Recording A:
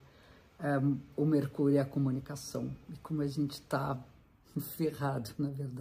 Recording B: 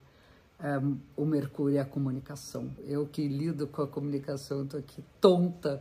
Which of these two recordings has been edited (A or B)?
B